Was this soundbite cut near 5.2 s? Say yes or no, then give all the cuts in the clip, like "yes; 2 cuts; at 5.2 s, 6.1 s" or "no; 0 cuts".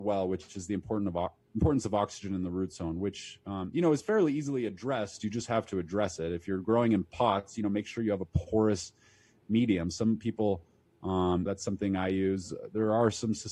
no; 1 cut; at 11.5 s